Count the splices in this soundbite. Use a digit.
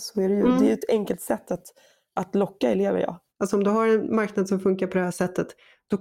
1